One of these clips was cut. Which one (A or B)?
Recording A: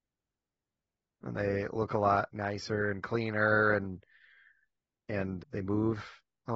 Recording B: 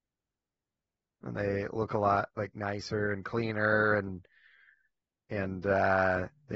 A